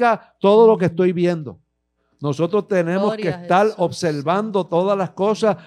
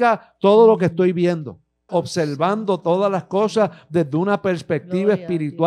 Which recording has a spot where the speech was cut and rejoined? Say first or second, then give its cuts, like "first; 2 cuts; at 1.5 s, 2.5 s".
second; 1 cut; at 1.9 s